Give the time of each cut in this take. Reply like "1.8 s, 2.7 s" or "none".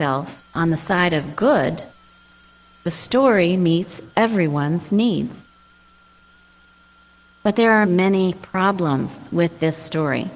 7.8 s